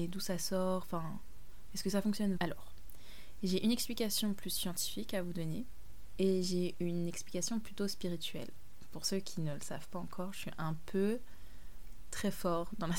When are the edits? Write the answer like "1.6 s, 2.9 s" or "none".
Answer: 2.4 s, 6.2 s